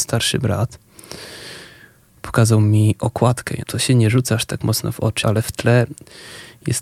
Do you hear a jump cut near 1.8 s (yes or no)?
no